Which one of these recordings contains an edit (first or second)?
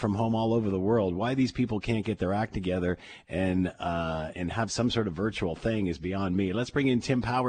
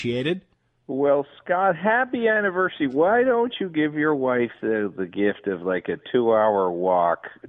first